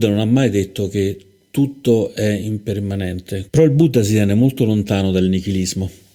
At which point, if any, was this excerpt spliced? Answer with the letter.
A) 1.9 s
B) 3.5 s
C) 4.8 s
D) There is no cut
B